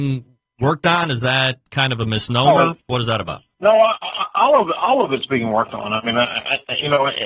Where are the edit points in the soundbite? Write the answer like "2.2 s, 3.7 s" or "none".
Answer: none